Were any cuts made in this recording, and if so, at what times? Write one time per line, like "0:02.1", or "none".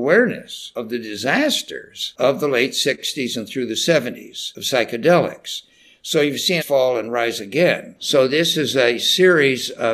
0:06.6
0:08.0